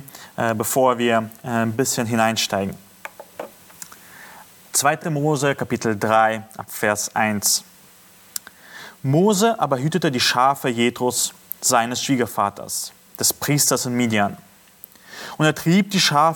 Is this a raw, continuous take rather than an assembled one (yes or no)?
yes